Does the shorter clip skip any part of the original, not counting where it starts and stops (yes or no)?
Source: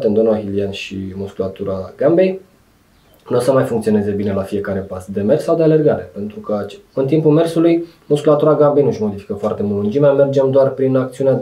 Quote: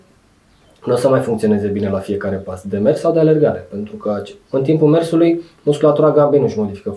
no